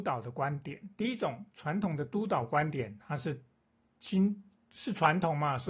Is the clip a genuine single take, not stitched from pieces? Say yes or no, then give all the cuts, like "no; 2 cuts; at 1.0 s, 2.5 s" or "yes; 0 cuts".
yes; 0 cuts